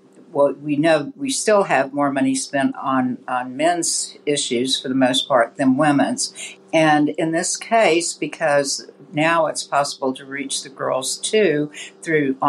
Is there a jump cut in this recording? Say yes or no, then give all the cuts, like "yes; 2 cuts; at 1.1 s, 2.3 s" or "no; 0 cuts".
yes; 1 cut; at 6.6 s